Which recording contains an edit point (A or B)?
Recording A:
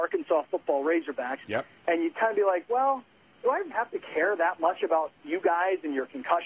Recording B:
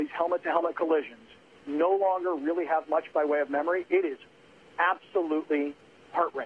A